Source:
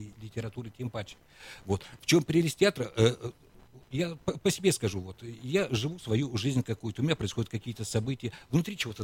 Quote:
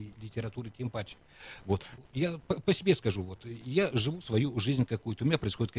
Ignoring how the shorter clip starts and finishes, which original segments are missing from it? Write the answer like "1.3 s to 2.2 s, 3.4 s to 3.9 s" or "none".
2.0 s to 3.7 s